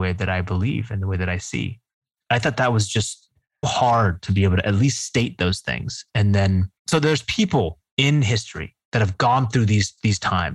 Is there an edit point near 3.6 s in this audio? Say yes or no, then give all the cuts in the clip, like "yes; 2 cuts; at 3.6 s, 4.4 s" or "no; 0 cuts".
yes; 2 cuts; at 3.6 s, 6.8 s